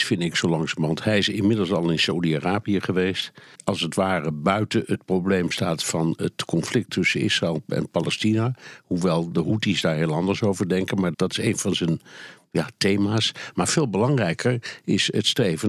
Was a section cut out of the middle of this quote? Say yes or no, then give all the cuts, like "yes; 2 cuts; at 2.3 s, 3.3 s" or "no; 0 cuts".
yes; 2 cuts; at 3.5 s, 11.1 s